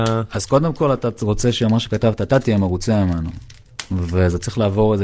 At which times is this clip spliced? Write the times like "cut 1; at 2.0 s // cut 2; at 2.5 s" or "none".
none